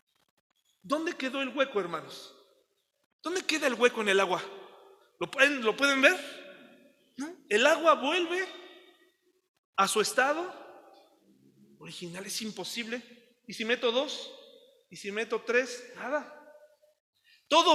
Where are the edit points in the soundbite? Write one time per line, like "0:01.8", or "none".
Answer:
none